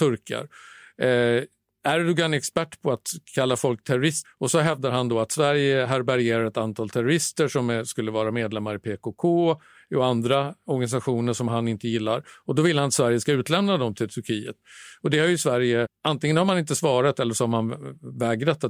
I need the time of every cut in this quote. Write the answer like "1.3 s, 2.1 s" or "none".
4.2 s, 15.9 s